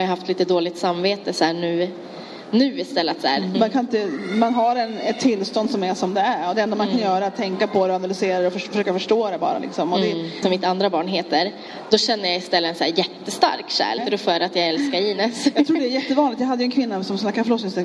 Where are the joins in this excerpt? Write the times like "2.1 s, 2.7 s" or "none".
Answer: 3.5 s, 10.4 s, 14.0 s